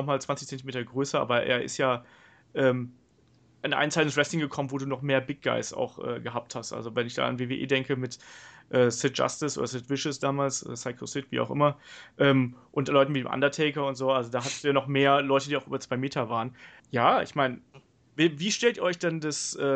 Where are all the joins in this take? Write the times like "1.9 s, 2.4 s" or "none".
16.8 s